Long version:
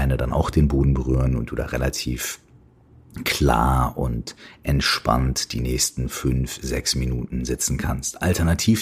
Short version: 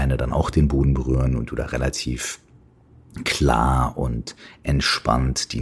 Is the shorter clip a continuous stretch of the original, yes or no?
yes